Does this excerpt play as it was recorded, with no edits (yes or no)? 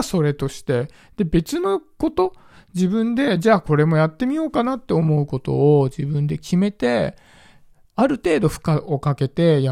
yes